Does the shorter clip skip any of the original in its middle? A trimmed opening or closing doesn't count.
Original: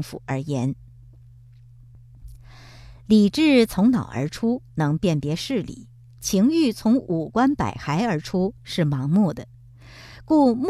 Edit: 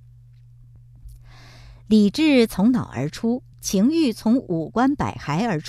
yes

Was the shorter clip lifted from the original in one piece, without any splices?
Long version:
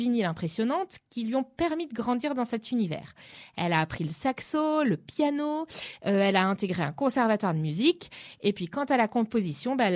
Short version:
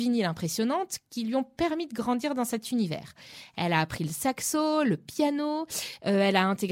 yes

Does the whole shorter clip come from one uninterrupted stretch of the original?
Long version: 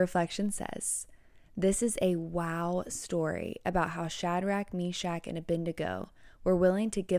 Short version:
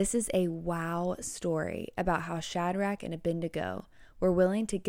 no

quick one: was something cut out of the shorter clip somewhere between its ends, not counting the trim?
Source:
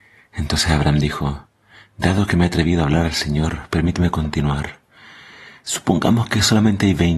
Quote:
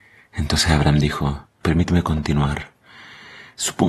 yes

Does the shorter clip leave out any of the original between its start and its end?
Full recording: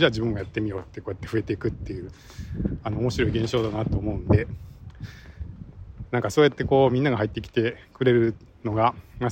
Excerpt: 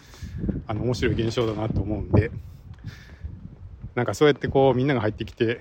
no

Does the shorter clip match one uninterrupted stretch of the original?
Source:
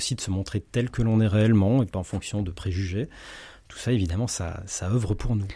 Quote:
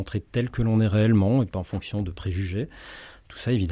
yes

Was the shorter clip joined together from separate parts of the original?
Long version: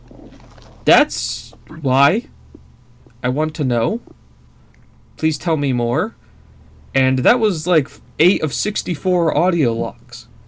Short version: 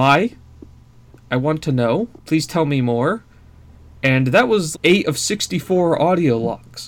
yes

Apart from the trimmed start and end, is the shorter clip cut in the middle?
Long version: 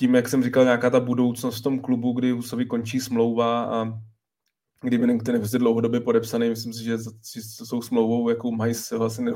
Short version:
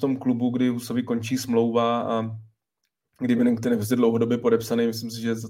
no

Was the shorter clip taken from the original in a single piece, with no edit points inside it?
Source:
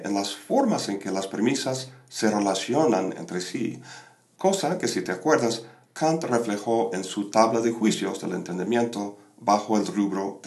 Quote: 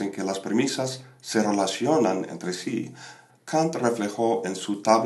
no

